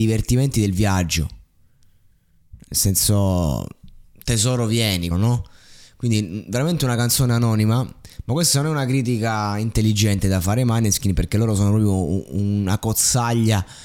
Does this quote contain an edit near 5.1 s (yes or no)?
yes